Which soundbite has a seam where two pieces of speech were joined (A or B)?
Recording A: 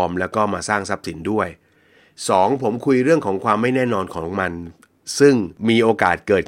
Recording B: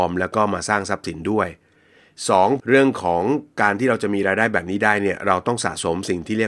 B